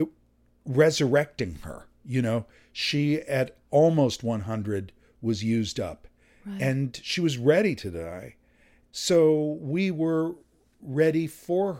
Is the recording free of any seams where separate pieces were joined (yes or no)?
yes